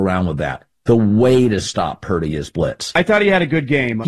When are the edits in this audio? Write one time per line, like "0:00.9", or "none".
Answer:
none